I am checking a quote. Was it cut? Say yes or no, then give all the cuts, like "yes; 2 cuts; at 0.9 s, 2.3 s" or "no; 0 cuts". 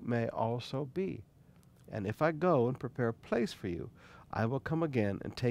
yes; 1 cut; at 1.8 s